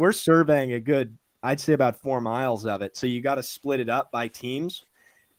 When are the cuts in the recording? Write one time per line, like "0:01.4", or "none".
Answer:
none

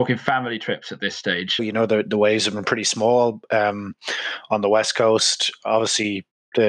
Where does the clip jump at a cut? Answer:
0:01.6

